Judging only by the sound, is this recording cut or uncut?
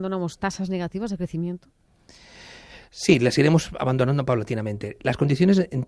uncut